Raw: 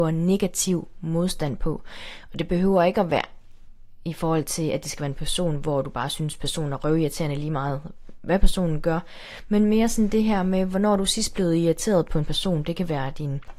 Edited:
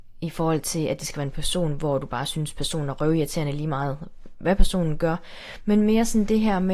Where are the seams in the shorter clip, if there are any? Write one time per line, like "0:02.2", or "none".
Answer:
none